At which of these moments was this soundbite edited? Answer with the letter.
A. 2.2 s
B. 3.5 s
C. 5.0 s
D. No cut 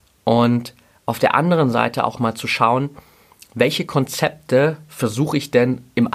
A